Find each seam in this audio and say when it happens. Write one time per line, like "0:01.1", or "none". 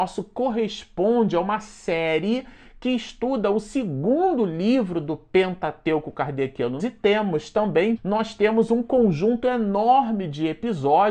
0:06.8
0:08.0